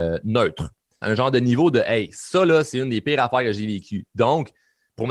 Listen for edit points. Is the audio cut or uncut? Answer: cut